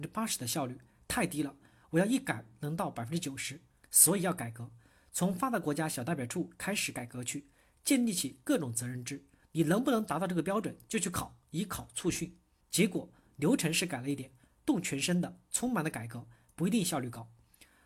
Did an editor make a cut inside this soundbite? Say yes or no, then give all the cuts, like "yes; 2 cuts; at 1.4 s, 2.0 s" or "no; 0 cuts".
yes; 3 cuts; at 3.8 s, 9.4 s, 12.6 s